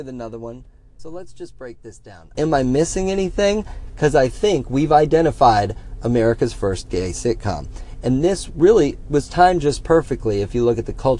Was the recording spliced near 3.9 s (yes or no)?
no